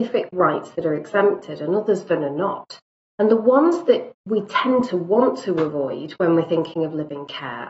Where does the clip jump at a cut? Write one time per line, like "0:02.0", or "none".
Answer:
none